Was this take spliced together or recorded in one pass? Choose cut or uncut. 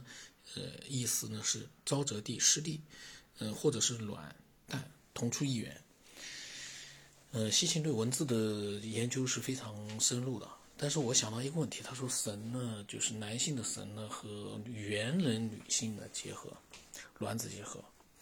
uncut